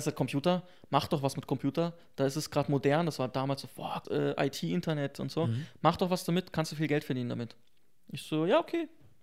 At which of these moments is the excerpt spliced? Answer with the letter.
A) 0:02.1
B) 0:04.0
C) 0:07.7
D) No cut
B